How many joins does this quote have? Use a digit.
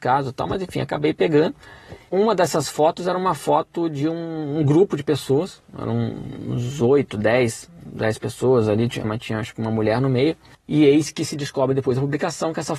2